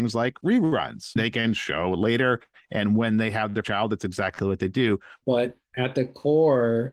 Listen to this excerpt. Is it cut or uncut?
cut